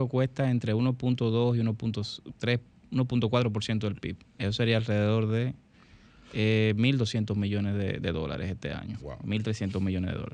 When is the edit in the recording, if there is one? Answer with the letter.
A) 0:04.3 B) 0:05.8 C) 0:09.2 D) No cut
D